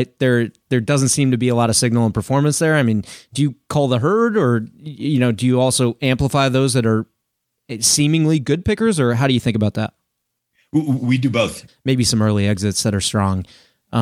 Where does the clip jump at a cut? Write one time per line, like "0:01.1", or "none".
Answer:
0:11.7